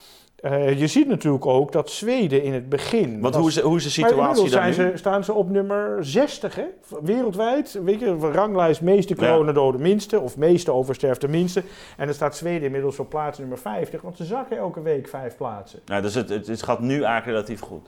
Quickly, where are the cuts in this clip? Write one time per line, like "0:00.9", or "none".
none